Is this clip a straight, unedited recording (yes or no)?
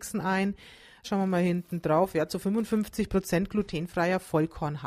no